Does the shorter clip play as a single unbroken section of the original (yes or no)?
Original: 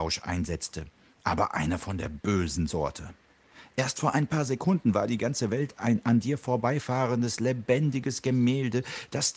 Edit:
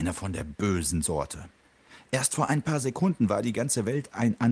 yes